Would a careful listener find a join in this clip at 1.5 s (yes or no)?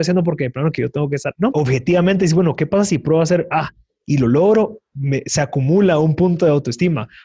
yes